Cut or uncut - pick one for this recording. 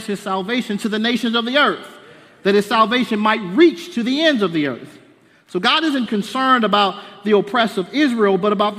cut